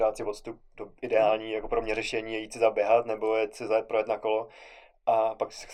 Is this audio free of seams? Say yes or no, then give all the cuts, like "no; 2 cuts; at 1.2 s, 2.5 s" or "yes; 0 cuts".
yes; 0 cuts